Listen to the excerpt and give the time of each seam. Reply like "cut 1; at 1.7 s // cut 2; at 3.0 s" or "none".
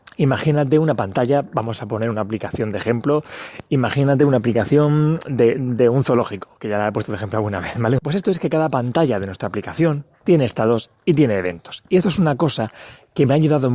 cut 1; at 8.0 s